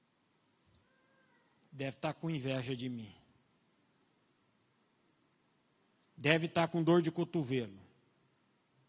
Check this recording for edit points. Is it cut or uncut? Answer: uncut